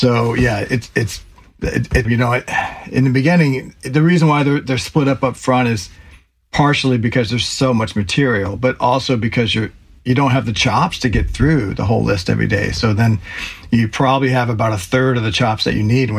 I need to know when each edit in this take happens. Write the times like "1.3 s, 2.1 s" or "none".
2.0 s